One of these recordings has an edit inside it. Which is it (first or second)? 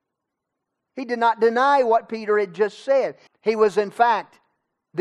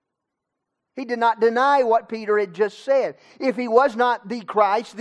first